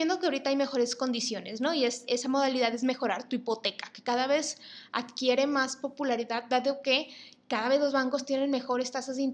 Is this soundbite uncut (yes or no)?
no